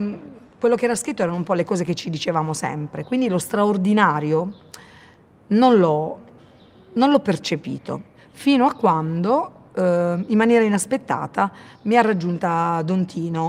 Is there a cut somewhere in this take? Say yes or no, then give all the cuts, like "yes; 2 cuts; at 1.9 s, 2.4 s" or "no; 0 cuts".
no; 0 cuts